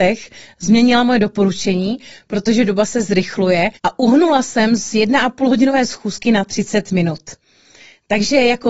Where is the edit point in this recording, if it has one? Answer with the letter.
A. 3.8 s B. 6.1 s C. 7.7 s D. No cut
A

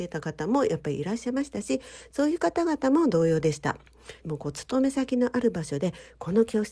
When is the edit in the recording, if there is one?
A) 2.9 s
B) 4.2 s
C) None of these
B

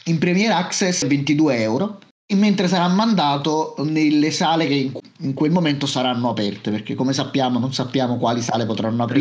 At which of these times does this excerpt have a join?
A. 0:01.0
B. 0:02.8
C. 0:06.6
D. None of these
A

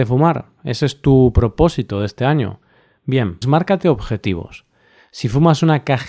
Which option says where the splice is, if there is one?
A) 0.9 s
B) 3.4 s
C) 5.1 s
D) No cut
B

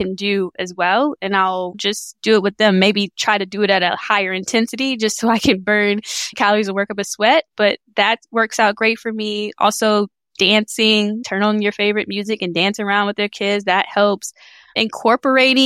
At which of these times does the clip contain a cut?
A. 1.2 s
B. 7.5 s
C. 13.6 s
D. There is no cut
D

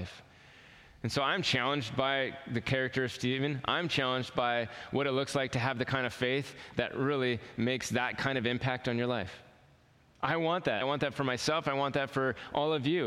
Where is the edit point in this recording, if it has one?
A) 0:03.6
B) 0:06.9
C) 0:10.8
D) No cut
C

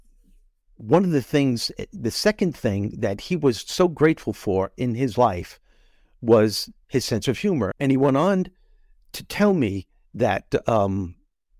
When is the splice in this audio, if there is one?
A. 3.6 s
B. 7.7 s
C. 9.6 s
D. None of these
B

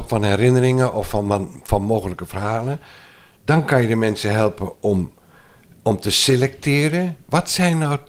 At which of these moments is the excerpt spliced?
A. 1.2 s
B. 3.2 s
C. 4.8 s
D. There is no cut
D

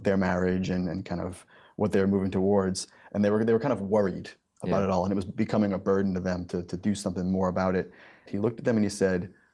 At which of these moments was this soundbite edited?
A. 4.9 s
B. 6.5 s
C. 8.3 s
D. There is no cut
C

